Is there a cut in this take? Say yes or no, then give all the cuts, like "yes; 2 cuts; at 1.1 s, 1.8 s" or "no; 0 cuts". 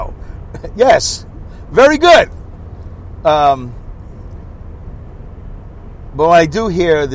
no; 0 cuts